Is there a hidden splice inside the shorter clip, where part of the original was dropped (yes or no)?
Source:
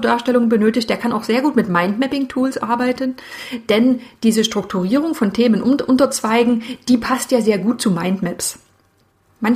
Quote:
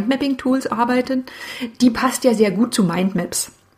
yes